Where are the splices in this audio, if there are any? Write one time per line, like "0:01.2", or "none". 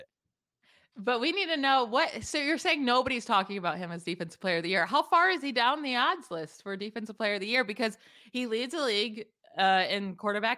none